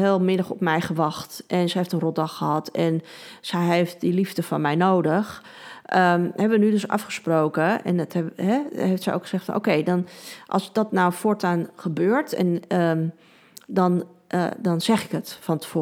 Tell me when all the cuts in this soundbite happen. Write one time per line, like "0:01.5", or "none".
none